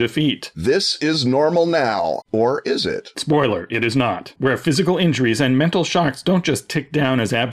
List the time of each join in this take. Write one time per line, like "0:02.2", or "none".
0:02.2
0:04.4